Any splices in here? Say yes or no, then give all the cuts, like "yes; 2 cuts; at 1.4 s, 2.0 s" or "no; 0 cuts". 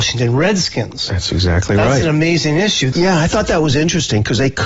yes; 1 cut; at 2.9 s